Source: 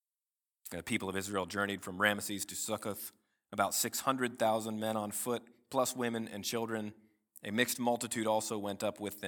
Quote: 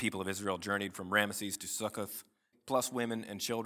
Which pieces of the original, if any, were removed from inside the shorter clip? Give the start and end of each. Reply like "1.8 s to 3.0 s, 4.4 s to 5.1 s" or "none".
3.4 s to 5.6 s